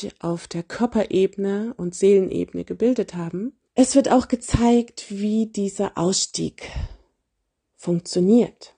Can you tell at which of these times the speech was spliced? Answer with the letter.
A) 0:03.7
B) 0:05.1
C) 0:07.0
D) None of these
A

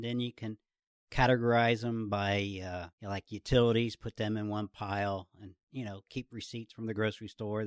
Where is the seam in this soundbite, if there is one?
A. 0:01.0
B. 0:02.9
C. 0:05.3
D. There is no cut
B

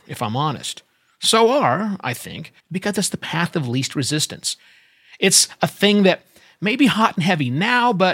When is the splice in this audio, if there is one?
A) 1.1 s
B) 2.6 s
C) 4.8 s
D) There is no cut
B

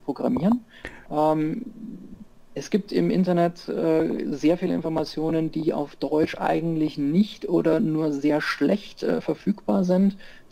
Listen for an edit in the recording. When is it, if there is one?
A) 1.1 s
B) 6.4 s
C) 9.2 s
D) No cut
A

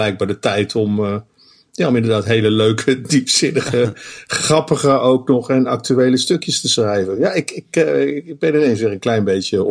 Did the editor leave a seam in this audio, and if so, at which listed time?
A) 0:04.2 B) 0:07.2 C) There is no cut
C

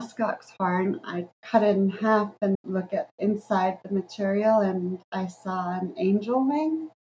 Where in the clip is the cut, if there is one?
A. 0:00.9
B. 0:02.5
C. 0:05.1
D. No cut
B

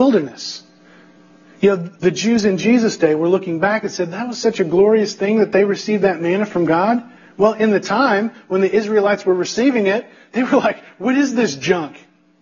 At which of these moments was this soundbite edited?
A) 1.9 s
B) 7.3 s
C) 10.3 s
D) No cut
A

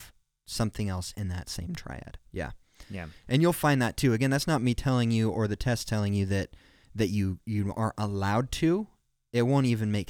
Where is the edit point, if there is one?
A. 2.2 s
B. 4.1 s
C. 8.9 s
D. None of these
A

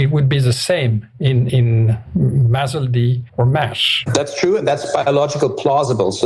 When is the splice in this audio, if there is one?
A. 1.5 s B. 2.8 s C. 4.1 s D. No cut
A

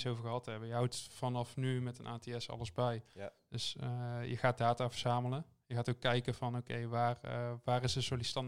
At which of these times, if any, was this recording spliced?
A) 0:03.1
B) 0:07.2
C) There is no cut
C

